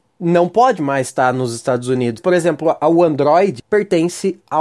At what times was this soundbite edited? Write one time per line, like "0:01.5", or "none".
0:02.2
0:03.6